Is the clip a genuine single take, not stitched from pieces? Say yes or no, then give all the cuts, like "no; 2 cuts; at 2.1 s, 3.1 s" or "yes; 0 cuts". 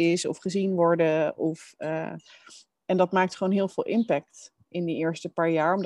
yes; 0 cuts